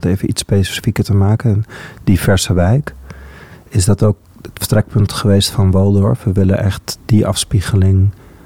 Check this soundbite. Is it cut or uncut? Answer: uncut